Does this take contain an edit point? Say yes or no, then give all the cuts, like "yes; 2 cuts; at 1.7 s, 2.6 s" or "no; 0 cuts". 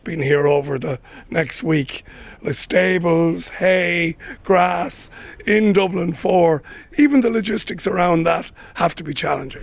no; 0 cuts